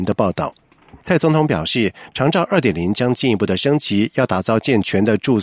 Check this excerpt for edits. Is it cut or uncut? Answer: cut